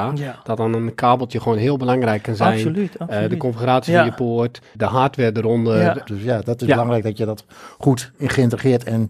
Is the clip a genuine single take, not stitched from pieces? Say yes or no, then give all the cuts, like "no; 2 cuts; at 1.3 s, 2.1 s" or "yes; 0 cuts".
no; 2 cuts; at 4.7 s, 6.1 s